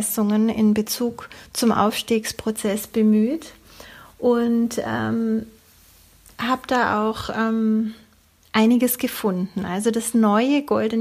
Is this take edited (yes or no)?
no